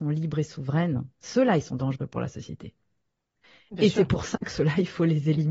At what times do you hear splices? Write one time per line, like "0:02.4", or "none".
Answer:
none